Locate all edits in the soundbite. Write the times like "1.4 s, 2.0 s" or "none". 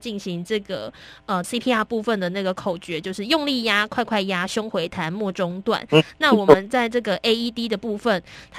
1.4 s